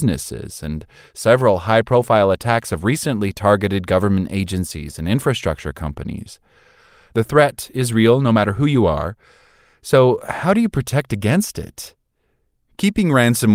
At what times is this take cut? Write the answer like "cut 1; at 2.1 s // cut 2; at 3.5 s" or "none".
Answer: none